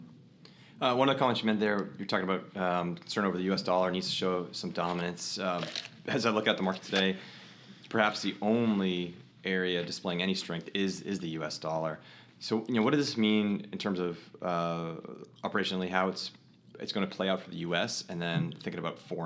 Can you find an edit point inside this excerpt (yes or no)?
no